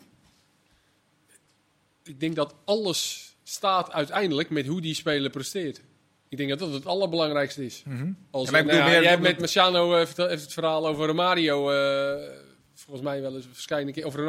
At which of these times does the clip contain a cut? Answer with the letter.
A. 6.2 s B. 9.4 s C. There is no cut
B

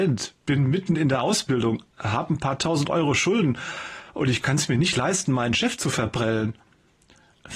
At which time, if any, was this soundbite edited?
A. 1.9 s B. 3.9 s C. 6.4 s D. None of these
A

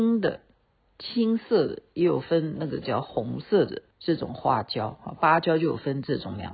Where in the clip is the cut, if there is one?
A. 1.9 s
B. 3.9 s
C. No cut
B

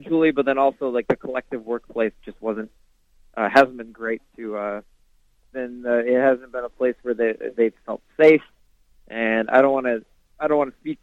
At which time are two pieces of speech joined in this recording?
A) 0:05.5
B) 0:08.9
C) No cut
A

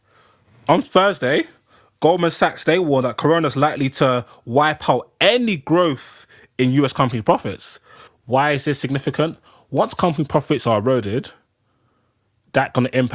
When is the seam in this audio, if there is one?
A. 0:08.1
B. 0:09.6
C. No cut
A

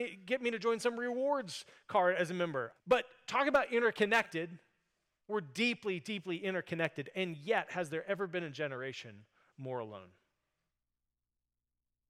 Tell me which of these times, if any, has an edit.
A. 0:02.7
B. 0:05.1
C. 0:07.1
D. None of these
A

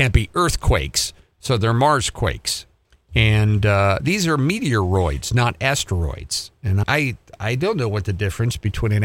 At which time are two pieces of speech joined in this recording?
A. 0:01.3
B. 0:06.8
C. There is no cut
B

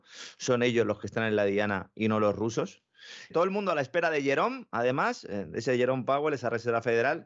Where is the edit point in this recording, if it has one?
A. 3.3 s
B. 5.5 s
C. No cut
A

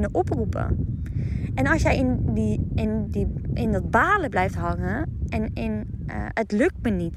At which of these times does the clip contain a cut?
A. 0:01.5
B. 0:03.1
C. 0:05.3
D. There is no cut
D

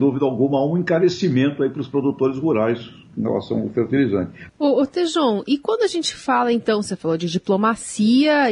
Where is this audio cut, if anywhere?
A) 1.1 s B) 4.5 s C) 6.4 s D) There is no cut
B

